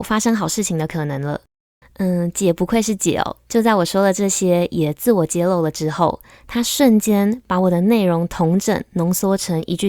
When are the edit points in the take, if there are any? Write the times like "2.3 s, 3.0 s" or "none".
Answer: 1.8 s